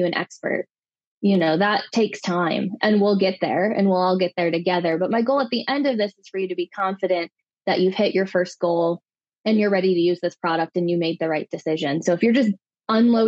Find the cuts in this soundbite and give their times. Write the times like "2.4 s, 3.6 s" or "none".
none